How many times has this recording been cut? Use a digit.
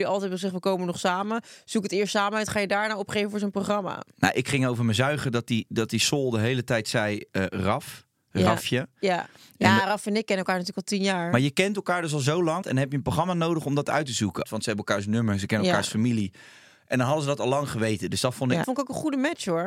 3